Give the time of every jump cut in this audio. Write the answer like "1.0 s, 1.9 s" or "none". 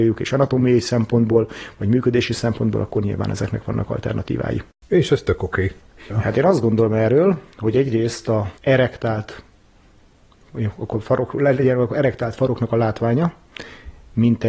6.1 s, 8.6 s